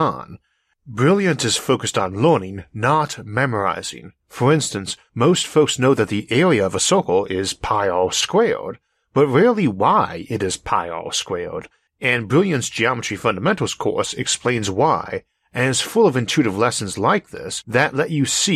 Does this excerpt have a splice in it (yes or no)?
no